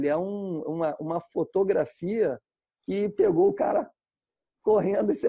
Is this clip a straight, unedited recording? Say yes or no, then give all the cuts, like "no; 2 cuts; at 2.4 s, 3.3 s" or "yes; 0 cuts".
yes; 0 cuts